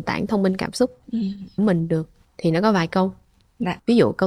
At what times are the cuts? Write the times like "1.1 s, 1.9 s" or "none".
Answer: 1.6 s